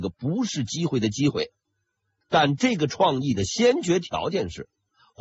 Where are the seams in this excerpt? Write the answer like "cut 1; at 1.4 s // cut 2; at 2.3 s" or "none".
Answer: cut 1; at 2.2 s